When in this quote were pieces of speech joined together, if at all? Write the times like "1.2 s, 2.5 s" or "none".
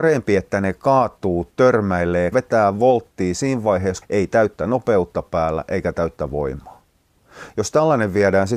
2.3 s, 4.0 s